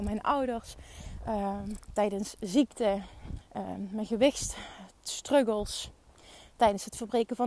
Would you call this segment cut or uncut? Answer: cut